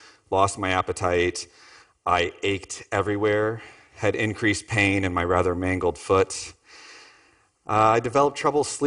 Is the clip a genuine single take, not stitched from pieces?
yes; 0 cuts

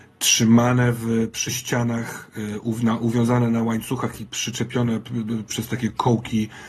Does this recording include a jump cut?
yes; 1 cut; at 5.5 s

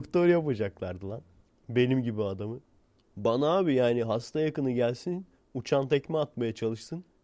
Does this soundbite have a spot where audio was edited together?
yes; 1 cut; at 1.5 s

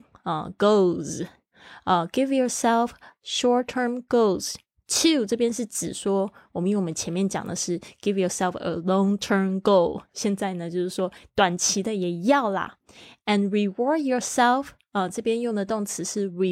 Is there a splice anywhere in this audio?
no; 0 cuts

